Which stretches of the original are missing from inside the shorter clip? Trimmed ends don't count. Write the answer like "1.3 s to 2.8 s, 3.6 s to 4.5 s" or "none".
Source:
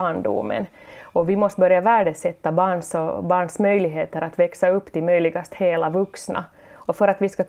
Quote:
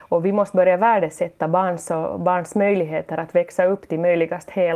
none